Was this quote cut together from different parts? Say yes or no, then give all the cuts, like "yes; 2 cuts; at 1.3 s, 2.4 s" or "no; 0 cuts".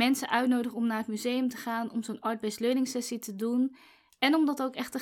no; 0 cuts